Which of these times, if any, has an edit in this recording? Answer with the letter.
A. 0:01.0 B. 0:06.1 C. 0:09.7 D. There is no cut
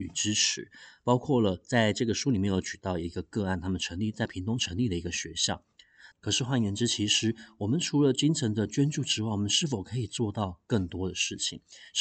B